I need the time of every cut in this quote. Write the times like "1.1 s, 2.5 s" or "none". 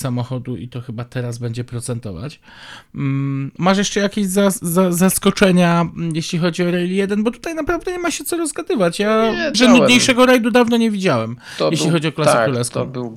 9.5 s